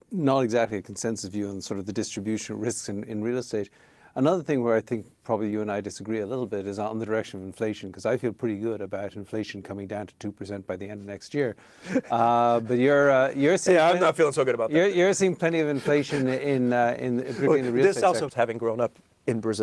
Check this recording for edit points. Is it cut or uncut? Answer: cut